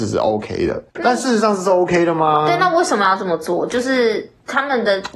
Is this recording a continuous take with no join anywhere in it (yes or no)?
no